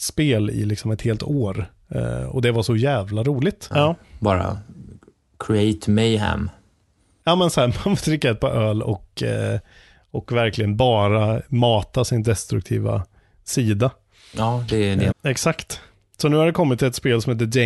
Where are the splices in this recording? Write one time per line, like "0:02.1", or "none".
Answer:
0:03.7
0:15.1